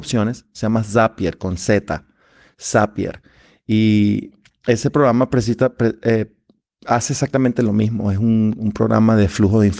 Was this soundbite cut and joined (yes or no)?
no